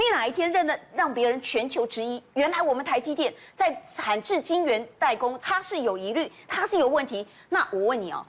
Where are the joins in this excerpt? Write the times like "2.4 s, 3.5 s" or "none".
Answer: 5.4 s